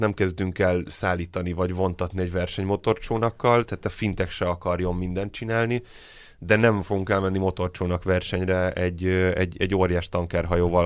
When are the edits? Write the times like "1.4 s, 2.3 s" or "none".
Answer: none